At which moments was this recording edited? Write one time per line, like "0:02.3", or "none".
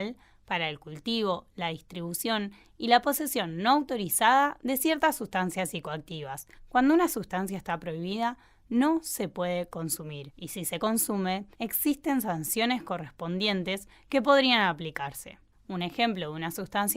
0:01.5